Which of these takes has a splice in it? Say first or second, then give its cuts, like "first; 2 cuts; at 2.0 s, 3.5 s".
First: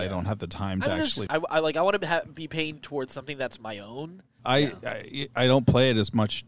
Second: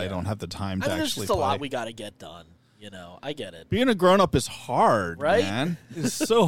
first; 2 cuts; at 1.3 s, 4.4 s